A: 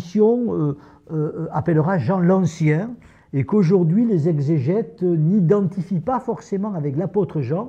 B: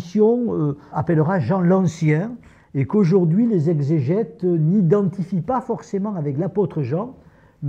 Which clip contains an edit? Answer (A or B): B